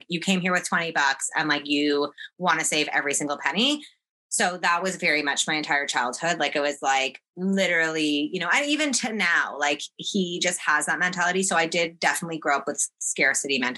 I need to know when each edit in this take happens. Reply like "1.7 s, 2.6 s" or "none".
none